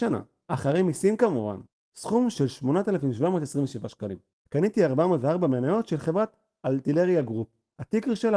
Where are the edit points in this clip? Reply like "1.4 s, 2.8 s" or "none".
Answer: 4.3 s